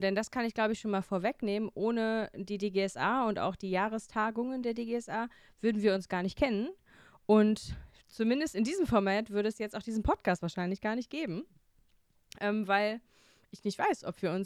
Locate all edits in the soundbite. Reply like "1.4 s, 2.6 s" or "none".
none